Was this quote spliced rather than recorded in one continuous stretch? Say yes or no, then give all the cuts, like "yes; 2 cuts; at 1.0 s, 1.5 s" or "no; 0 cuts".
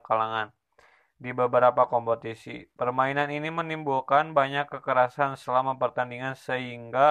no; 0 cuts